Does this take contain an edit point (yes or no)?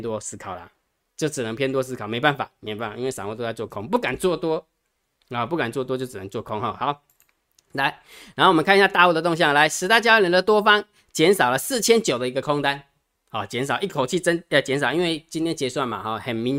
no